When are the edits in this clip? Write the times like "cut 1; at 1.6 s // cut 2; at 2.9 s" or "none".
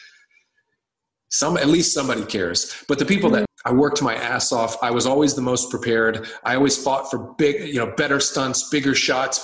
cut 1; at 3.5 s